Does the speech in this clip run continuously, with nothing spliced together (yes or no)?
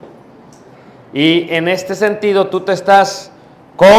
yes